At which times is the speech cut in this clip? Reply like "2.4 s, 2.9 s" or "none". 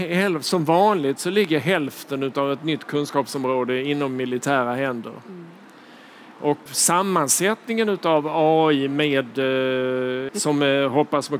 6.7 s, 10.3 s

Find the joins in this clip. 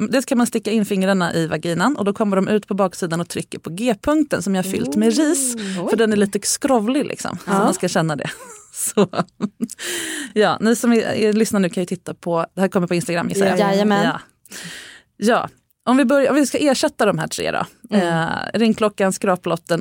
none

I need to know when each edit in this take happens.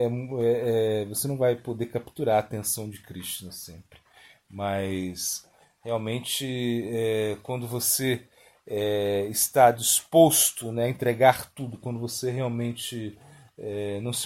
none

